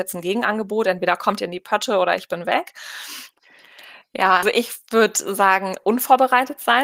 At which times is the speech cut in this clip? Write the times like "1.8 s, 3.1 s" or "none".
3.3 s, 4.4 s

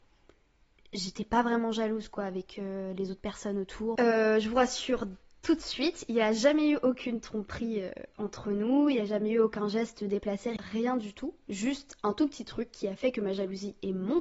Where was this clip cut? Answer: 4.0 s

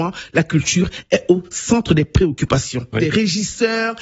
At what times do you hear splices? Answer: 2.9 s

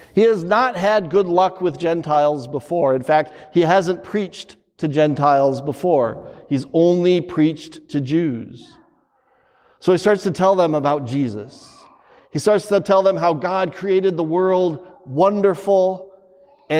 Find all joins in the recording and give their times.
none

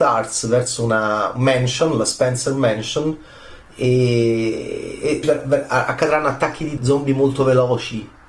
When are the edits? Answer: 5.2 s, 6.8 s

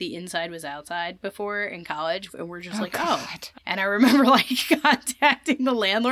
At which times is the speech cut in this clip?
2.3 s, 3.6 s

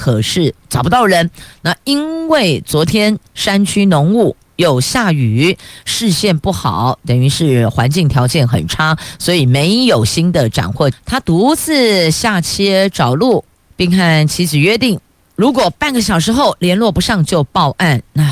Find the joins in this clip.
10.9 s

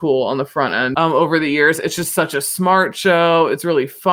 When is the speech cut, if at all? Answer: 0.9 s

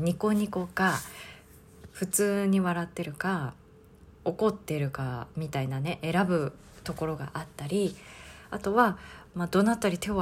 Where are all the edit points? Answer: 4.2 s

